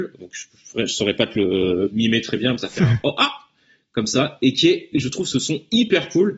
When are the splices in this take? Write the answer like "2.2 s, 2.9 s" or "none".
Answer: 1.9 s